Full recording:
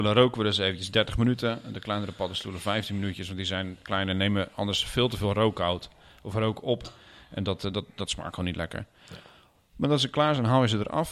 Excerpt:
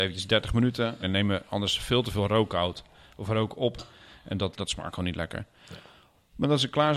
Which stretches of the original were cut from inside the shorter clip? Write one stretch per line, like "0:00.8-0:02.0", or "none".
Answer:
0:01.7-0:04.1
0:07.6-0:07.9

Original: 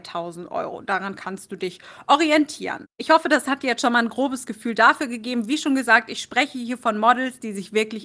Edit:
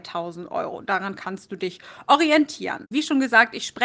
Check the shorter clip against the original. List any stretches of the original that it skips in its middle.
0:02.9-0:05.5

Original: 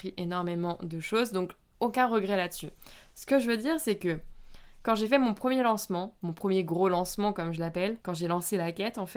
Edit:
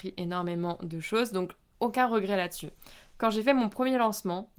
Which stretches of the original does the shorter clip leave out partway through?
0:03.1-0:04.8

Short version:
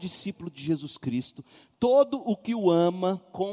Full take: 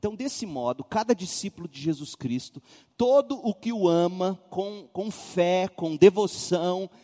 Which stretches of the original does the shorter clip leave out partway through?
none

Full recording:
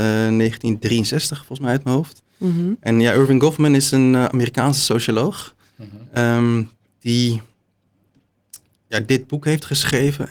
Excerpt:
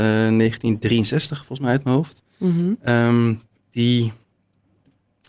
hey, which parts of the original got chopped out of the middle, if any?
0:02.8-0:06.1

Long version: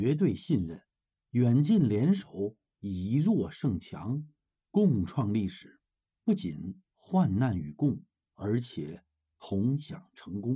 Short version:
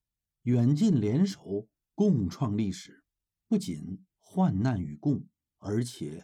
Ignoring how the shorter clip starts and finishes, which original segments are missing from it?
0:02.6-0:04.5

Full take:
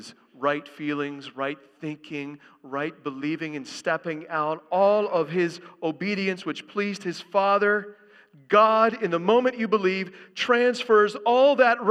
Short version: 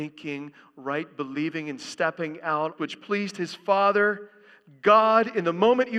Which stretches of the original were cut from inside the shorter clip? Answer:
0:04.6-0:06.4

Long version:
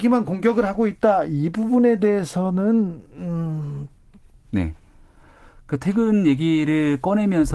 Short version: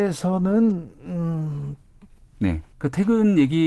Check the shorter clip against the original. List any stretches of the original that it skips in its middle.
0:04.8-0:05.6

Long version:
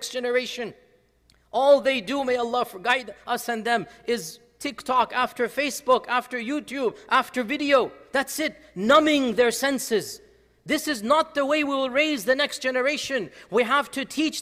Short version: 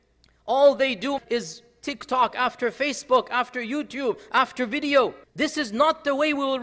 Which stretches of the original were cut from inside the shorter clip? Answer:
0:02.2-0:04.0
0:08.0-0:10.5

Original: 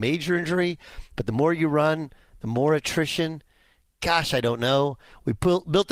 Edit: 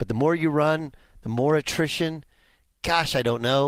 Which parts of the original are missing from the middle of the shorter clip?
none

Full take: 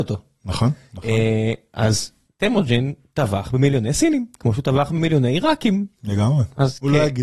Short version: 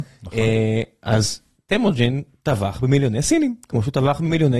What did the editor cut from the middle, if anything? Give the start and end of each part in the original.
none

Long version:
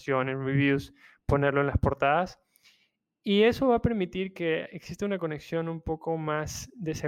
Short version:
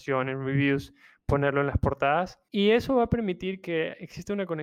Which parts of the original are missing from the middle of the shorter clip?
0:02.5-0:03.2

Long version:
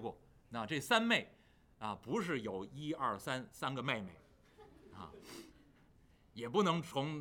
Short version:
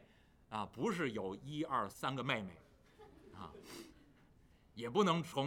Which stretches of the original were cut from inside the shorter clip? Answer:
0:03.2-0:03.5

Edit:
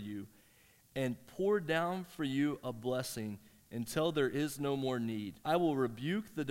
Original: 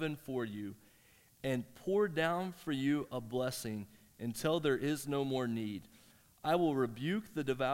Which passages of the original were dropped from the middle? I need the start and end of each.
0:05.9-0:06.4

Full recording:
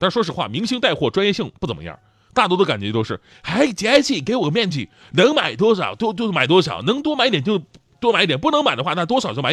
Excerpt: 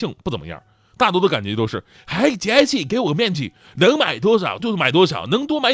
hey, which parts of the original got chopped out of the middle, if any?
0:06.0-0:06.2

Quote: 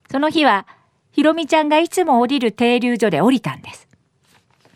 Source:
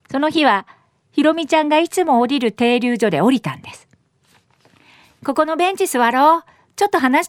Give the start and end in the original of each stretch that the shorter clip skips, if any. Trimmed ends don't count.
none

